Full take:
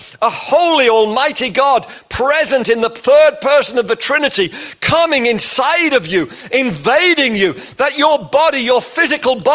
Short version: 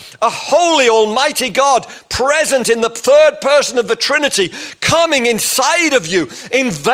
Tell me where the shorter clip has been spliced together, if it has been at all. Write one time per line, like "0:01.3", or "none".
none